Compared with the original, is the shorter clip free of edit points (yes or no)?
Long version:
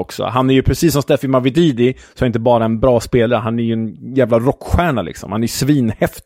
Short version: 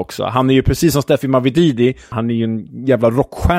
no